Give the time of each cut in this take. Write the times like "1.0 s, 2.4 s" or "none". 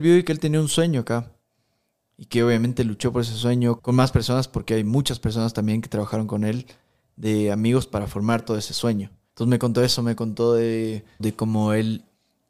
3.8 s